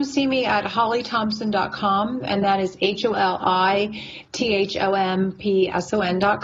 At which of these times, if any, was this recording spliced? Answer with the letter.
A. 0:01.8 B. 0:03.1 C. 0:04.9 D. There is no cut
B